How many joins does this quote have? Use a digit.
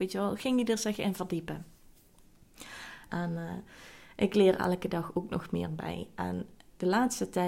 1